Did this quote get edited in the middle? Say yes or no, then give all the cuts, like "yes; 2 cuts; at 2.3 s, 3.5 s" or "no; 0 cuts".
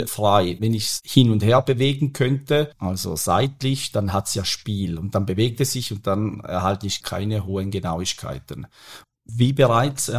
yes; 1 cut; at 9.0 s